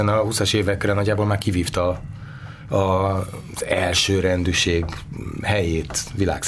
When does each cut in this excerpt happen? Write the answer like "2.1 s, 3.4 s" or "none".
none

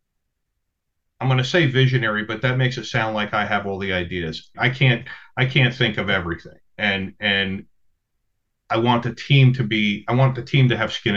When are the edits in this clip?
4.5 s

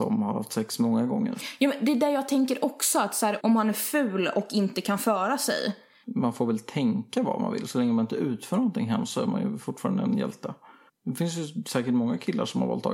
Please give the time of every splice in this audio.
3.4 s, 6.0 s, 10.9 s

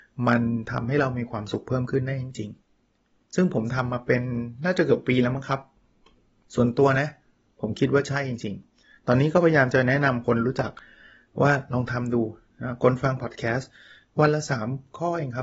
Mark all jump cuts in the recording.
none

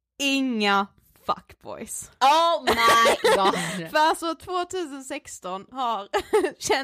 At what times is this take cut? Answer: none

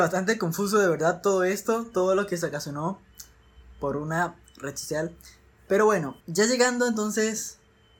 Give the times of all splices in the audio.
6.2 s

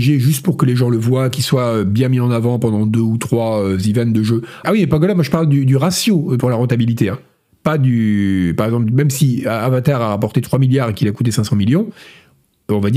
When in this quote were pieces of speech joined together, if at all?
4.6 s

